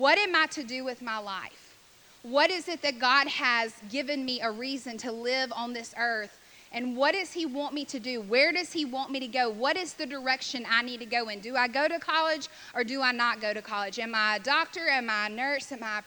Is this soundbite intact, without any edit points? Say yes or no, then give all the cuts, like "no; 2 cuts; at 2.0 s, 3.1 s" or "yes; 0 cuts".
yes; 0 cuts